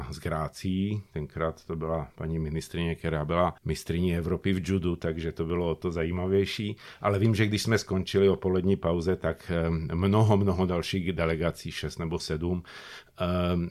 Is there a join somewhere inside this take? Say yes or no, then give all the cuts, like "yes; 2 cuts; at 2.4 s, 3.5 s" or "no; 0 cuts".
yes; 1 cut; at 3.6 s